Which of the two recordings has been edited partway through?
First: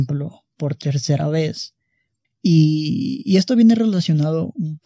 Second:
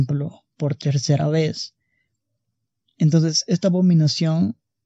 first; 1 cut; at 2.2 s

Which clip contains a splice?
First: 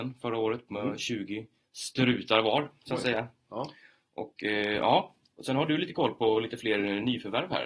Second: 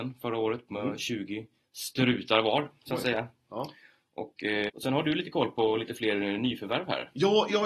second; 1 cut; at 4.7 s

